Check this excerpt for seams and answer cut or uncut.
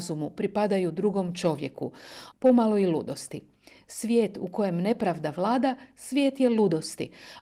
cut